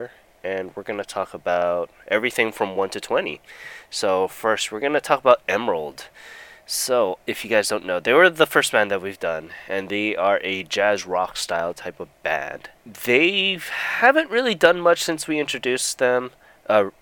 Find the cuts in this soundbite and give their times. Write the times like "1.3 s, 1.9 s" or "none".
none